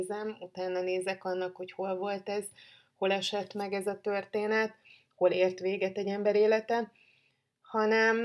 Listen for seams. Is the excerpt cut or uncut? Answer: uncut